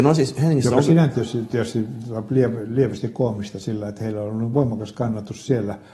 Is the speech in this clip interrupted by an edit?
no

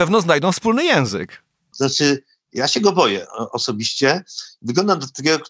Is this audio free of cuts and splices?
no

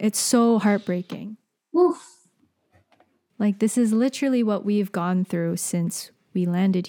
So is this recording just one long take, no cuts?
no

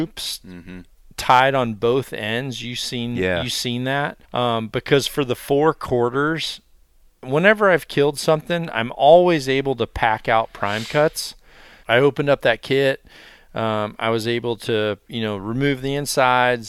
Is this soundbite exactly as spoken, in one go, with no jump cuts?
no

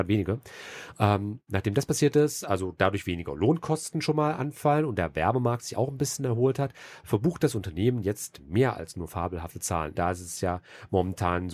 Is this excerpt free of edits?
no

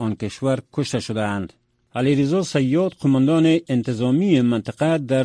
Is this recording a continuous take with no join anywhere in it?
no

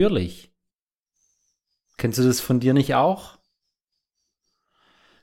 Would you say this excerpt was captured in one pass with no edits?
yes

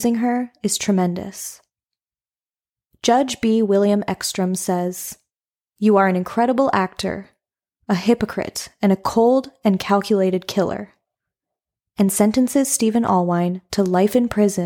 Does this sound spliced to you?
no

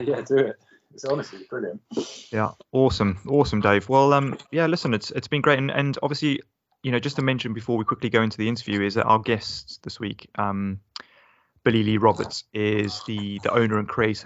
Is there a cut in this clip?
no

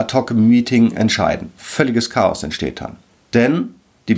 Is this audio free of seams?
yes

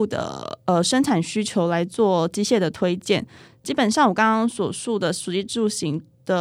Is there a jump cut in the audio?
no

